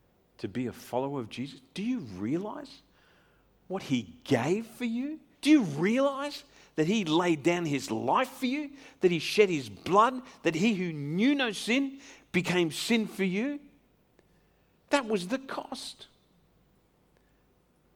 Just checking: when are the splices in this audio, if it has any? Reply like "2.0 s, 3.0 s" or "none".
5.3 s